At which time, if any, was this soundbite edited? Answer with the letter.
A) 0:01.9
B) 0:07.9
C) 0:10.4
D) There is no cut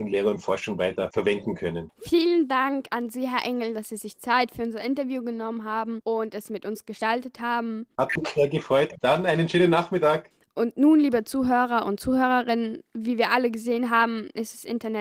D